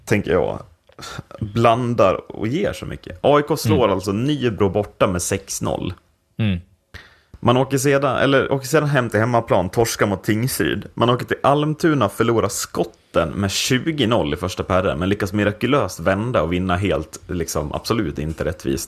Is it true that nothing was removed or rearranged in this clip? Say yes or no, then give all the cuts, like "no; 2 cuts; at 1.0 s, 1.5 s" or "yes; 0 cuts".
yes; 0 cuts